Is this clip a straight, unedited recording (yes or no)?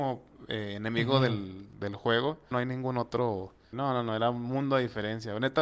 no